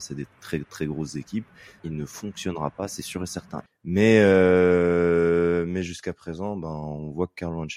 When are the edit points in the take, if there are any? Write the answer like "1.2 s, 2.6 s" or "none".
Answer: 1.8 s, 3.7 s